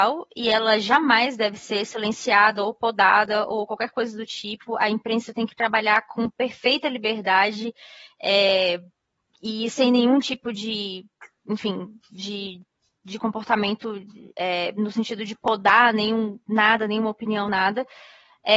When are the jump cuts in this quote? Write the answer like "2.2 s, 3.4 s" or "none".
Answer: none